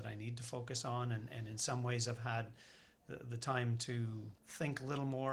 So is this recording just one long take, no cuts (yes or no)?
no